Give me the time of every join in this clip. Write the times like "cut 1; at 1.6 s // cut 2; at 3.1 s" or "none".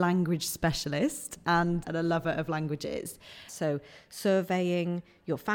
cut 1; at 1.8 s // cut 2; at 3.5 s